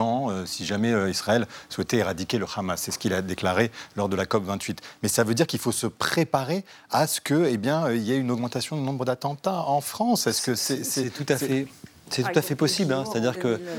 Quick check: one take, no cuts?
yes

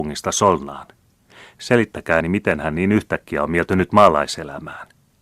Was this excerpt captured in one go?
no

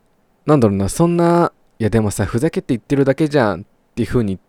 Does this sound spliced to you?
no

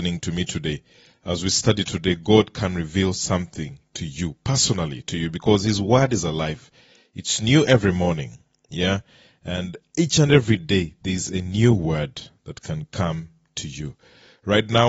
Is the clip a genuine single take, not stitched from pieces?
yes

